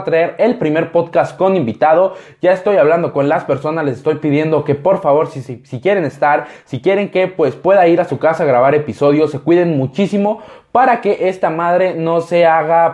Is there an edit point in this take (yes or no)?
no